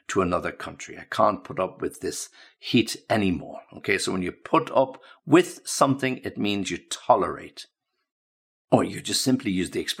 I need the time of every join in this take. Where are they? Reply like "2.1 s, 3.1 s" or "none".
none